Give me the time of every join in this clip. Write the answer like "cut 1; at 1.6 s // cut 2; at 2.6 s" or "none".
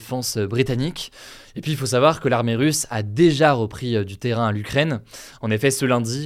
none